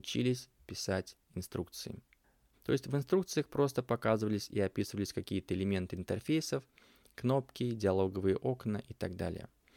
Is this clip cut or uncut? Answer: cut